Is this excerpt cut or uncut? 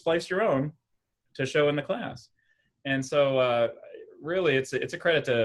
uncut